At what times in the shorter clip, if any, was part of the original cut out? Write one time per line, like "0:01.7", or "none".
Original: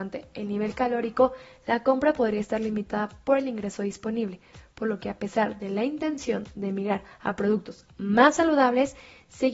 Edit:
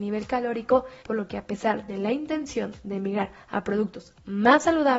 0:01.0